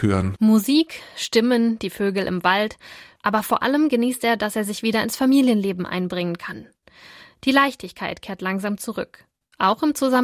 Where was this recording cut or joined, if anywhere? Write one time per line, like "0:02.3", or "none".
0:03.2

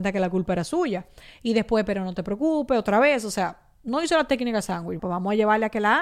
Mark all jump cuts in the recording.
0:05.0

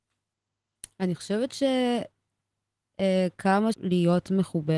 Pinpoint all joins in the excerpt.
0:03.7

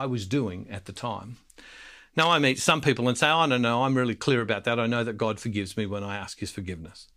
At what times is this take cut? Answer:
none

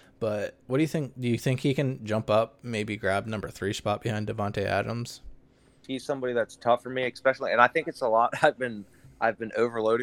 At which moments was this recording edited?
0:05.8

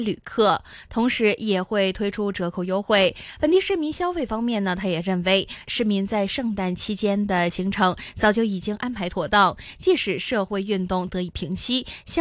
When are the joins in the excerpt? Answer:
none

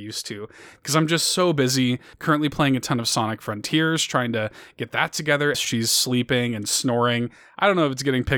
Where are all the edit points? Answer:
0:02.1
0:05.5

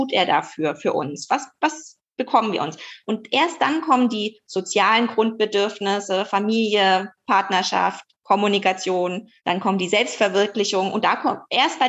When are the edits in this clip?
0:08.1
0:09.4

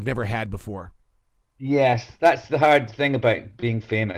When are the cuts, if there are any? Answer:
none

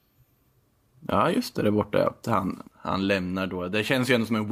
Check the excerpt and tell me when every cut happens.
0:02.7

